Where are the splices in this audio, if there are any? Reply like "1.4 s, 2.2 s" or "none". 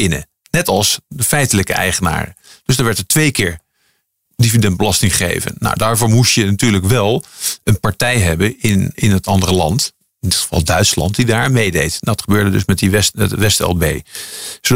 8.9 s

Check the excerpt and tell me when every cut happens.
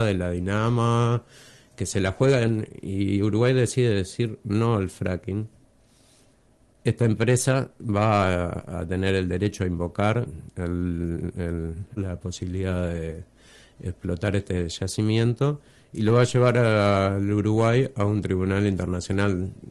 12.0 s

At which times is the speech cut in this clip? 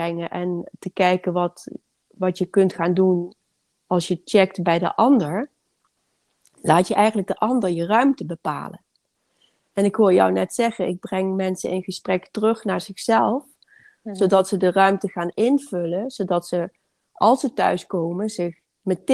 none

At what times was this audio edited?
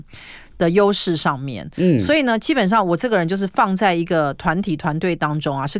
none

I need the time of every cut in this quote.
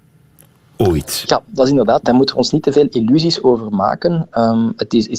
2.0 s

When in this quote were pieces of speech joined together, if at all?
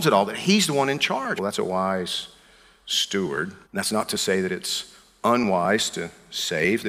1.4 s, 3.6 s

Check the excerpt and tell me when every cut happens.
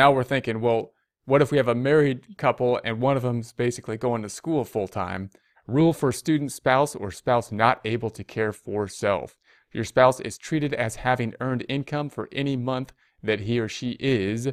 5.5 s

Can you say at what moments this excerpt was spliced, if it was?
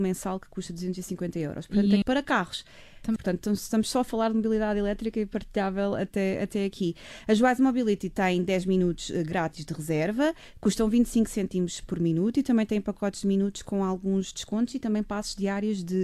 2.0 s, 3.2 s

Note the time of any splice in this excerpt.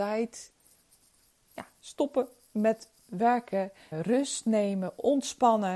3.9 s

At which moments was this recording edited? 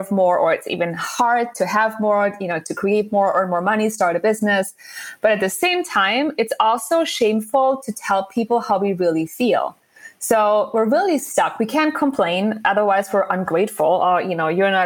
none

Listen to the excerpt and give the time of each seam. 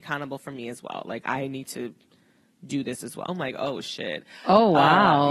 3.3 s

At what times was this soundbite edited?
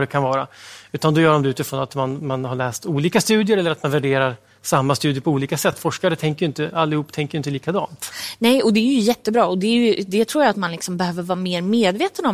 none

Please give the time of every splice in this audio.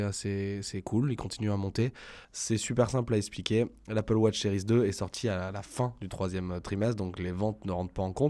2.2 s

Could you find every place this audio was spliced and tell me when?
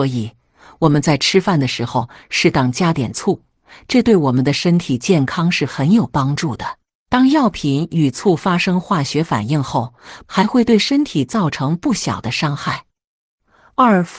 7.1 s, 10.3 s

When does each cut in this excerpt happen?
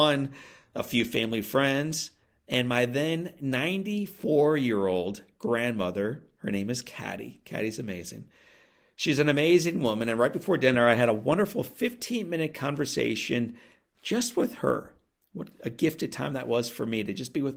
none

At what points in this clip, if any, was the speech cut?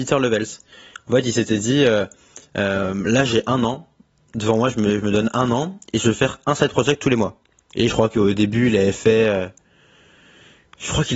7.7 s

